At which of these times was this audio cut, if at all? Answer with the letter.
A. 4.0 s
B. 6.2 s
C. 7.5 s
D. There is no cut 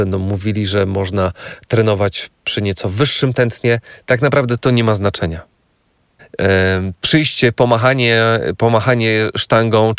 B